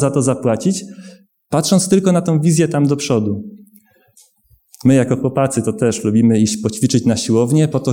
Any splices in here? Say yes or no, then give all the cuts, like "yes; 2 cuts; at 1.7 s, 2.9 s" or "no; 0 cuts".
no; 0 cuts